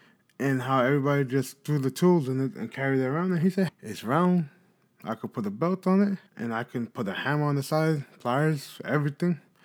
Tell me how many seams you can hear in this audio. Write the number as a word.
two